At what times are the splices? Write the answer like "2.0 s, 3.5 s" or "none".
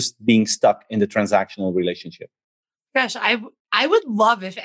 none